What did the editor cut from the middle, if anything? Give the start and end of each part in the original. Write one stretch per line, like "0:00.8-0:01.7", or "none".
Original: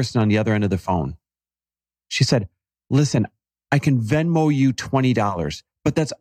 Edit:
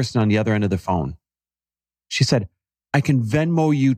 0:02.8-0:03.6